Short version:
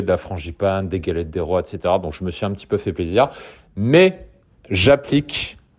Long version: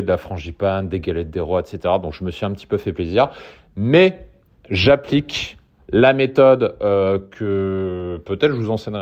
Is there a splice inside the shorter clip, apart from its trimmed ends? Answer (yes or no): no